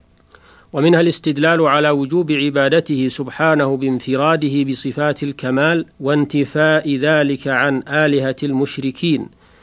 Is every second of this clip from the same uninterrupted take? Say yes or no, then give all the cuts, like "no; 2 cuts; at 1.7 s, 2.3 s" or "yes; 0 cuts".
no; 1 cut; at 5.9 s